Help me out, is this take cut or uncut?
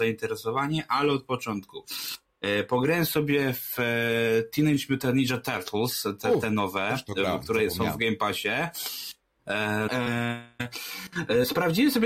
cut